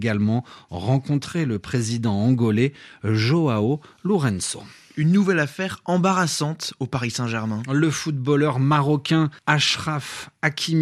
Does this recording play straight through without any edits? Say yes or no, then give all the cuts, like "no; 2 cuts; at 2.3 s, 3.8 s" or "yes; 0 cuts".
no; 1 cut; at 9.4 s